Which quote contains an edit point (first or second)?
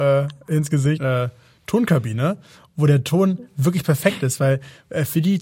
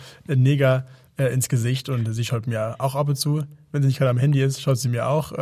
first